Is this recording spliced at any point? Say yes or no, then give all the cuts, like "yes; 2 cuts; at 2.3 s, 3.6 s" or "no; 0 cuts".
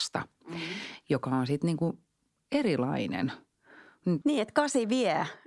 yes; 1 cut; at 4.2 s